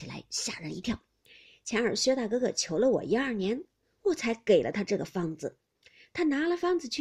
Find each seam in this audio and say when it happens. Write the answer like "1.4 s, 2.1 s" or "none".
none